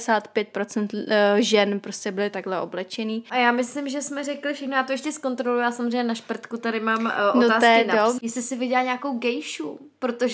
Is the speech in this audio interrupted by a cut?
yes; 1 cut; at 8.2 s

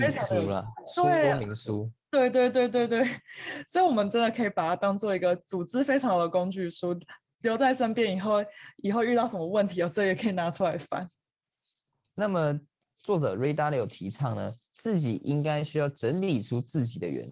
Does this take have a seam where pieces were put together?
yes; 1 cut; at 12.8 s

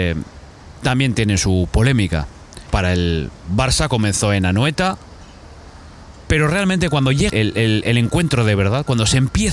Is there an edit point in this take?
yes; 3 cuts; at 2.7 s, 6.2 s, 7.3 s

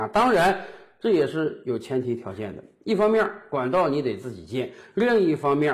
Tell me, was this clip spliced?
no; 0 cuts

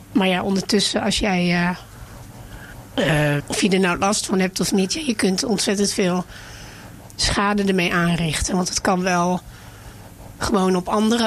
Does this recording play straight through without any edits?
no; 1 cut; at 3.4 s

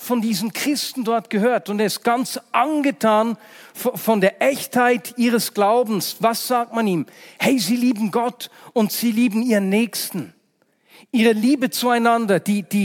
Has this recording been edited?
no; 0 cuts

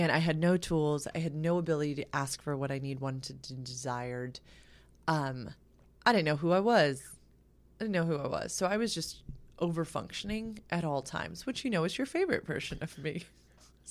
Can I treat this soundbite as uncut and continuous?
yes; 0 cuts

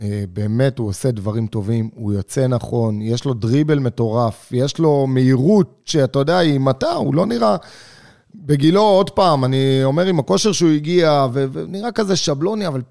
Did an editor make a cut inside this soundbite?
no; 0 cuts

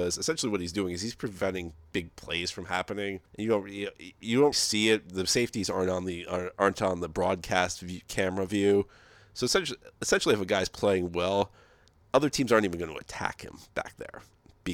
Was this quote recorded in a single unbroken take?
no; 2 cuts; at 3.3 s, 4.5 s

